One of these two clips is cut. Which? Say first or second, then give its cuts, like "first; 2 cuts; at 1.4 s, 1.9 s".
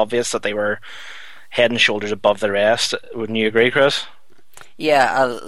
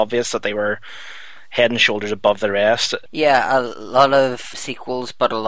second; 2 cuts; at 3.1 s, 4.5 s